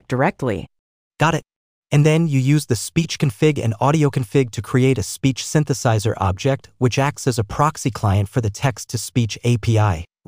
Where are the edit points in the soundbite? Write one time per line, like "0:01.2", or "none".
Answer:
none